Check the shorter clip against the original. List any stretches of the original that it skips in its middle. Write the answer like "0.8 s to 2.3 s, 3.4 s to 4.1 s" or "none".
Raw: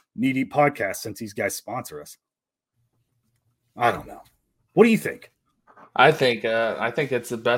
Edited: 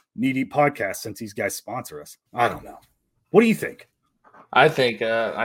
2.3 s to 3.7 s